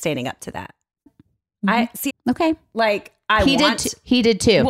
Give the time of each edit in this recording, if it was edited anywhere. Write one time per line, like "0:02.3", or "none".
0:01.1
0:02.1